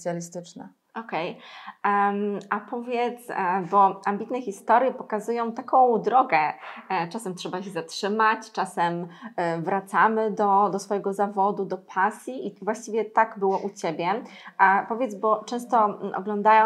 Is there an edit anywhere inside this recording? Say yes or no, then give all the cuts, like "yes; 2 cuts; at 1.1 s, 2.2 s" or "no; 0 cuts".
no; 0 cuts